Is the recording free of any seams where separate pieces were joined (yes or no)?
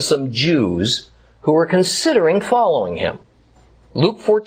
yes